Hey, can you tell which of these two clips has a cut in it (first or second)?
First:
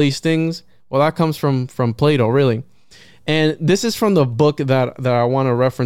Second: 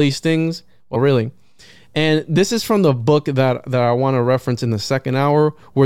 second